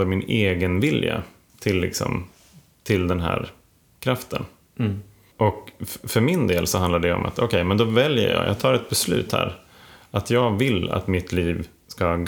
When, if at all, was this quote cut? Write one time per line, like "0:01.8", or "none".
none